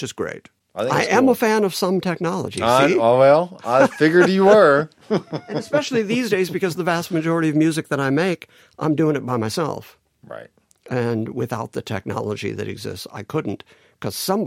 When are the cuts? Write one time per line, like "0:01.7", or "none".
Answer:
none